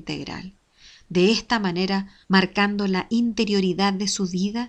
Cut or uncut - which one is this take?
cut